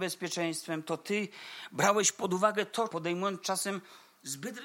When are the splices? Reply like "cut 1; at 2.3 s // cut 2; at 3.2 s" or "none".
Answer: cut 1; at 2.9 s